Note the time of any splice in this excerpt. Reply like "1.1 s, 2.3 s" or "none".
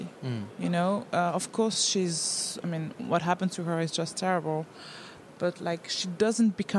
none